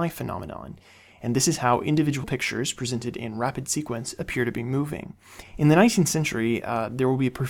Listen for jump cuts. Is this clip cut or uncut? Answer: cut